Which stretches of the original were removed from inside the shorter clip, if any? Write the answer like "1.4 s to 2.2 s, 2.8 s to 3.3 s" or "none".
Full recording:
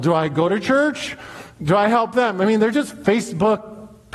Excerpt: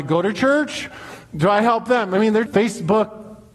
2.7 s to 3.0 s